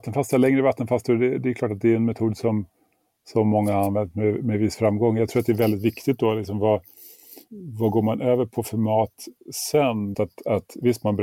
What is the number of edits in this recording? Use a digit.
2